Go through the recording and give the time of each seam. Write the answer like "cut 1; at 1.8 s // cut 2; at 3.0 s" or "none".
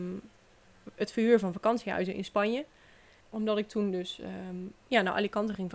cut 1; at 3.2 s